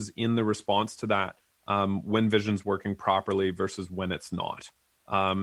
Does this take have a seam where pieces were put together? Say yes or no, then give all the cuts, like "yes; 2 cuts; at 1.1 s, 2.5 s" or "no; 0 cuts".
no; 0 cuts